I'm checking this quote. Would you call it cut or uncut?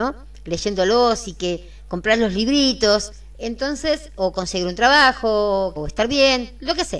cut